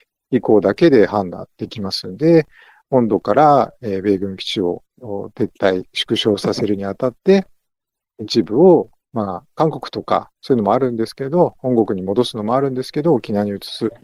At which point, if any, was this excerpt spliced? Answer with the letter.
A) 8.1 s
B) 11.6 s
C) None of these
C